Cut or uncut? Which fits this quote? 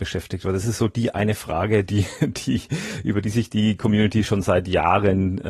uncut